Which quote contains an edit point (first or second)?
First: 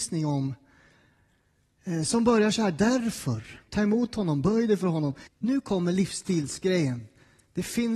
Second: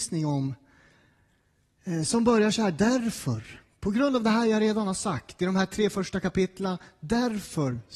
first